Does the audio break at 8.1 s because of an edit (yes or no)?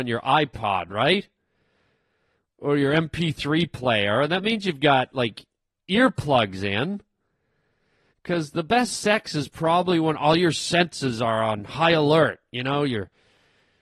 yes